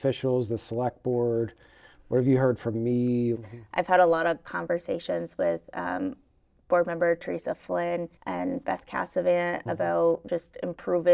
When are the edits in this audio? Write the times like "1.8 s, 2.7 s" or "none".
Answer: 3.3 s, 8.2 s